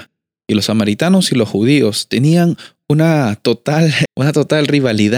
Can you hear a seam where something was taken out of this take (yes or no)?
yes